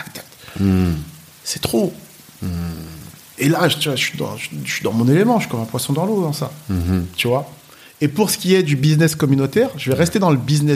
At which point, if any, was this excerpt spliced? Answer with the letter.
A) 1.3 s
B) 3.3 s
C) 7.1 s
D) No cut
D